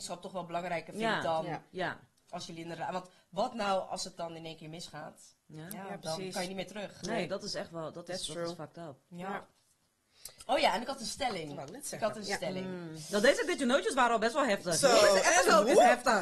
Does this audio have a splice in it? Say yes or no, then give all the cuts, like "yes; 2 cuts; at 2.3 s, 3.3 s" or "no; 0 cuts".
no; 0 cuts